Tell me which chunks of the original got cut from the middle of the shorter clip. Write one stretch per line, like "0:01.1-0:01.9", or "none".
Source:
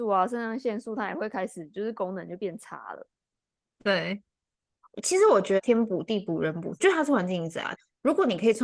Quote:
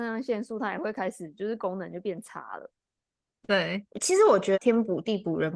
0:04.3-0:04.9